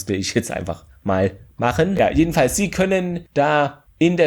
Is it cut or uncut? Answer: uncut